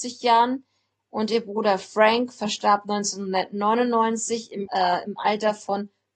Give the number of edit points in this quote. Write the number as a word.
two